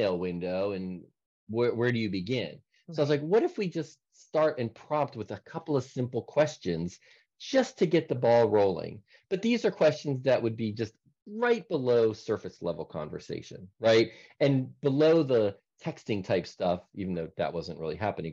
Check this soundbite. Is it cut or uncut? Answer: uncut